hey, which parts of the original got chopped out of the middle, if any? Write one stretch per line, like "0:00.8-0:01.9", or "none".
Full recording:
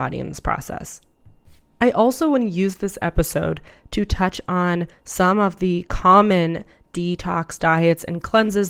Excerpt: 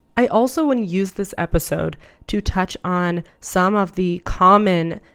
none